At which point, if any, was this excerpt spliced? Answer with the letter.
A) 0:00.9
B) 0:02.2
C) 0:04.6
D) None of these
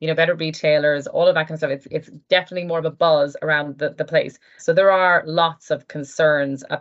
C